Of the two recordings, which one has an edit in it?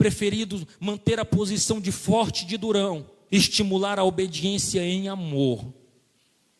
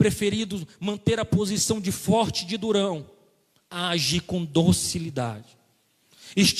first; 1 cut; at 3.3 s

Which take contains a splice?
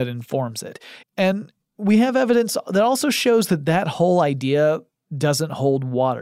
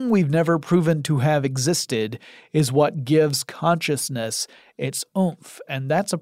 first; 1 cut; at 1.0 s

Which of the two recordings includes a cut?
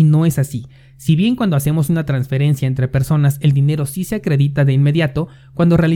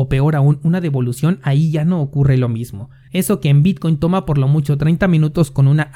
second; 1 cut; at 3.1 s

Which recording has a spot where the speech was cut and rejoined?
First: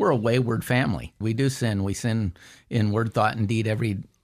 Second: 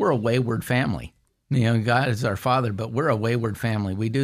first; 1 cut; at 1.2 s

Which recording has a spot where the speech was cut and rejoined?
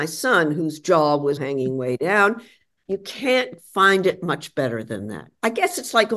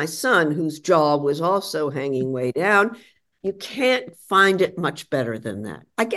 first; 1 cut; at 1.4 s

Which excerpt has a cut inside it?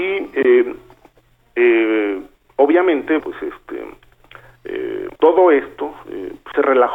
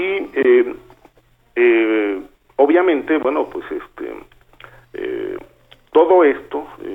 first; 2 cuts; at 3.2 s, 5.1 s

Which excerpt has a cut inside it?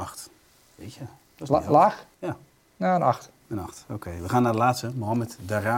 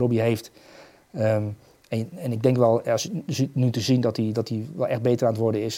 first; 1 cut; at 2.1 s

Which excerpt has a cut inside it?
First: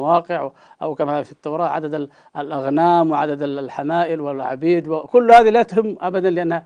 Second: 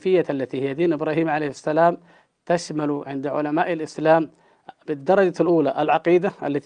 first; 1 cut; at 1.2 s

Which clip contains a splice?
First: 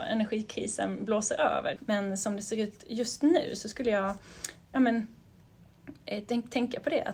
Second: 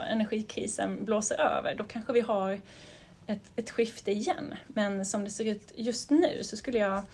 first; 1 cut; at 1.8 s

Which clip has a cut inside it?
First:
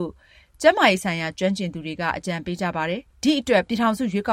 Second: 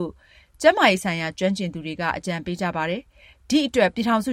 first; 1 cut; at 3.1 s

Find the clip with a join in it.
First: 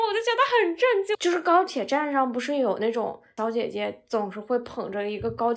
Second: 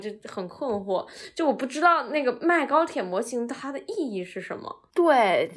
first; 1 cut; at 1.1 s

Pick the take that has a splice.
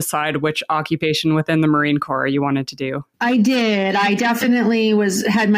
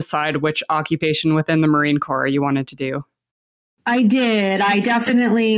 first; 1 cut; at 3.1 s

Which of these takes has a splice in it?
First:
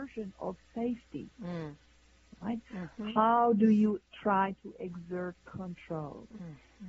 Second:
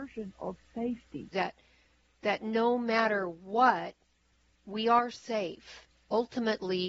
second; 1 cut; at 1.3 s

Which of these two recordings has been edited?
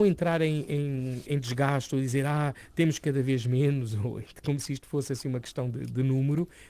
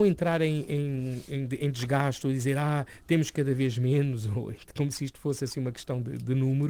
first; 1 cut; at 1.3 s

